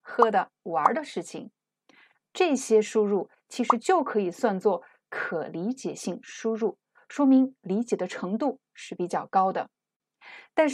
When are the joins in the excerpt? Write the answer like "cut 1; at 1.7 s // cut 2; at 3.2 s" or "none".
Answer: cut 1; at 2.2 s